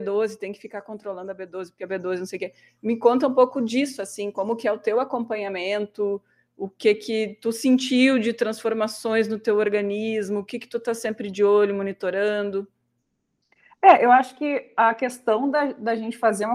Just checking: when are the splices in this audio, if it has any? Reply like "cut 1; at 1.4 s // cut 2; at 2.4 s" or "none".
none